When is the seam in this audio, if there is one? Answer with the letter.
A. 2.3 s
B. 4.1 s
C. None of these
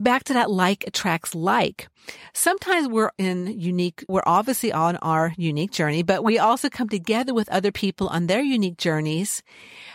B